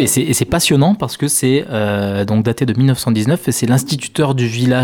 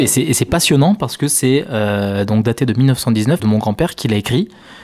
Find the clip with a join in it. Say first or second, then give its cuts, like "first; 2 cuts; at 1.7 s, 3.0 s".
second; 1 cut; at 3.4 s